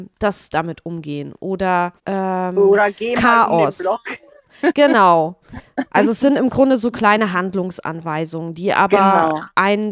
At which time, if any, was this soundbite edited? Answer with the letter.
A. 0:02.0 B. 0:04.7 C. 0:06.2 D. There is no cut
A